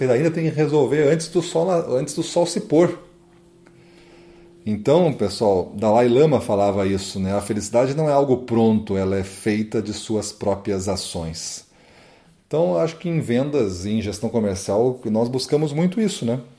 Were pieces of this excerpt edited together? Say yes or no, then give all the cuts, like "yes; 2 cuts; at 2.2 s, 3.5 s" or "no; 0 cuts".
no; 0 cuts